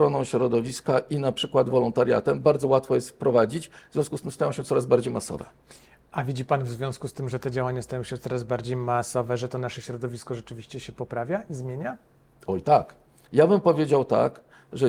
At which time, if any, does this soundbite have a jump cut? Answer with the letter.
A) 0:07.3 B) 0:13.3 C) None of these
B